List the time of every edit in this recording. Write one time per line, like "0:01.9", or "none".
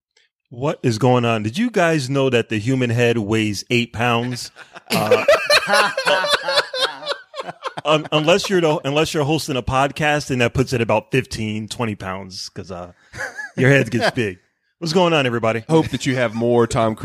0:14.1
0:15.7